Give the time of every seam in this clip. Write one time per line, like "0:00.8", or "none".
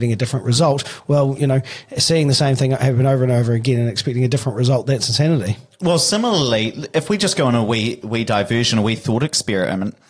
none